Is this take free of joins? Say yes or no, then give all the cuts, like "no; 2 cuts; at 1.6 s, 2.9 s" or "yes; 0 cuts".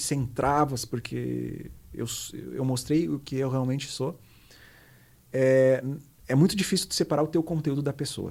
yes; 0 cuts